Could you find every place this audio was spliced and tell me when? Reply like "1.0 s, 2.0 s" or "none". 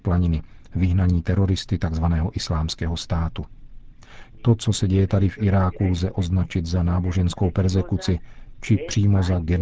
4.3 s